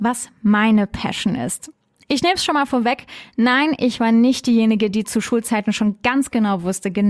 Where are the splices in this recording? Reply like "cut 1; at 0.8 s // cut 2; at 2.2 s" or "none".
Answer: none